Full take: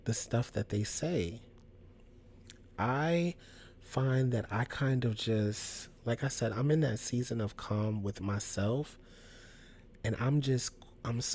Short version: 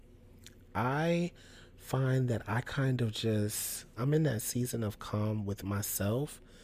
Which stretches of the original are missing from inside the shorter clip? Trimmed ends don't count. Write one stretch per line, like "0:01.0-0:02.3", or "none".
0:06.0-0:06.5